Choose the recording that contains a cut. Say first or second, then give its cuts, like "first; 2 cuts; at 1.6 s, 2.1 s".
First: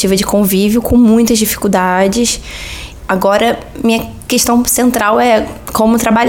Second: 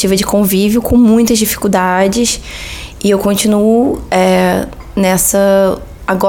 first; 1 cut; at 3.0 s